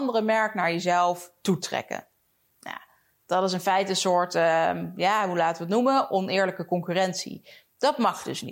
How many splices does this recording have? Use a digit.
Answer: 0